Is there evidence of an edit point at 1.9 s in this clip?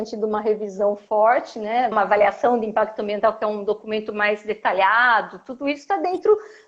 yes; 1 cut; at 1.9 s

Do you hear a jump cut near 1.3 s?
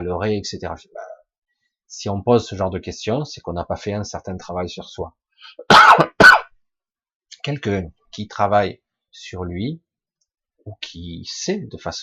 no; 0 cuts

